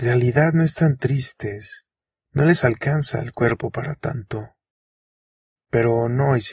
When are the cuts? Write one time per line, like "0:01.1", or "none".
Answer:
0:05.6